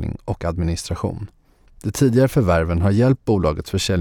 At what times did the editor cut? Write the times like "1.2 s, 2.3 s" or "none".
1.7 s